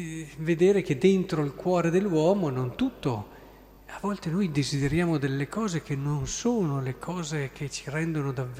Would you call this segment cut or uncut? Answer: uncut